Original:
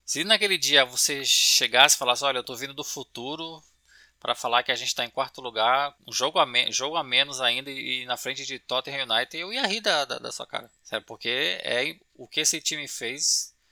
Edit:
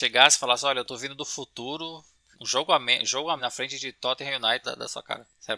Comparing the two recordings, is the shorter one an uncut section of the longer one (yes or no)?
no